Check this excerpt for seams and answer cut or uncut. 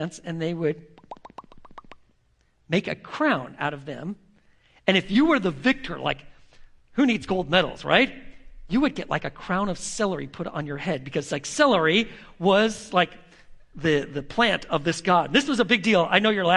uncut